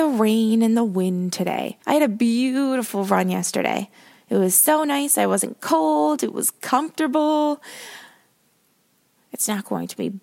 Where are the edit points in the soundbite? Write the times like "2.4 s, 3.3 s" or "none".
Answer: 1.8 s, 9.2 s